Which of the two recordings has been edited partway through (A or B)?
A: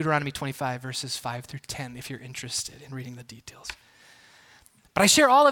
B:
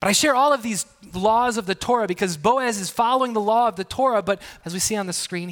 B